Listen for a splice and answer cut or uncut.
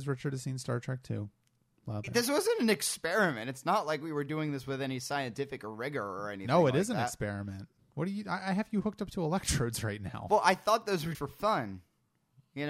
cut